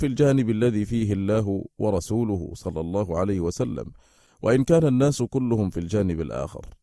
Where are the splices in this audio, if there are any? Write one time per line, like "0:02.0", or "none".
none